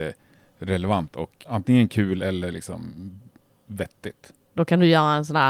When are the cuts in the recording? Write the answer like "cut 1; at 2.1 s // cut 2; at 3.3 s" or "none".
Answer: cut 1; at 1.4 s // cut 2; at 4.5 s